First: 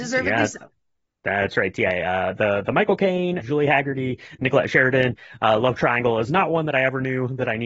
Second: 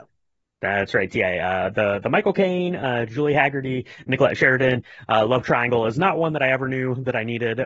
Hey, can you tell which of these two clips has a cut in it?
first; 1 cut; at 3.4 s

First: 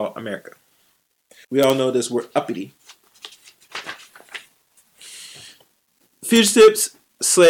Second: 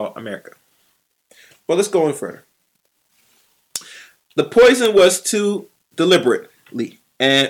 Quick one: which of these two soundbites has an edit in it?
first; 1 cut; at 1.4 s

